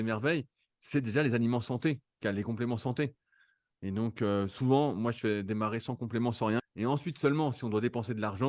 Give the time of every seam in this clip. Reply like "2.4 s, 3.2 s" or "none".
6.6 s